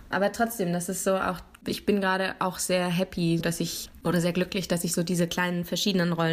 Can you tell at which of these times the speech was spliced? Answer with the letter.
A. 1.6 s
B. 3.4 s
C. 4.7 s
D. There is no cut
B